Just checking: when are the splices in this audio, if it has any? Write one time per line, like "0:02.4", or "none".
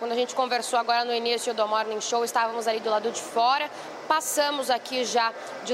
none